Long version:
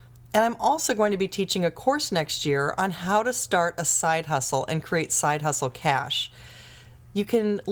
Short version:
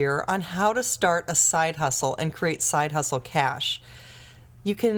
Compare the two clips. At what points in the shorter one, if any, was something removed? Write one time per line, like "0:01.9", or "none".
none